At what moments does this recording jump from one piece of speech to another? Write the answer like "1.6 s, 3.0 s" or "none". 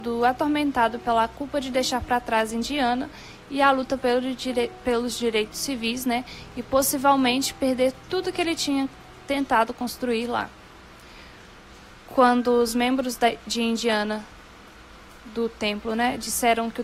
none